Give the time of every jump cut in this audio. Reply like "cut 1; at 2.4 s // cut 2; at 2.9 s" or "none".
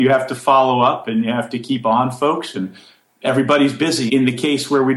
cut 1; at 4.1 s